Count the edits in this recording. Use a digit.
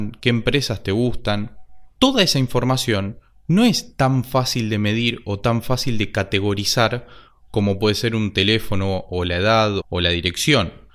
1